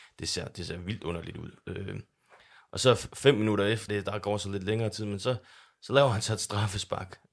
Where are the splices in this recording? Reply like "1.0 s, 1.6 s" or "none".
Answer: 3.9 s